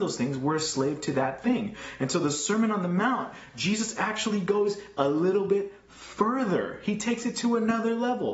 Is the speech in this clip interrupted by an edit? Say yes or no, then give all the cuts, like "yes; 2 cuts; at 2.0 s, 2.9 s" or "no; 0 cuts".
no; 0 cuts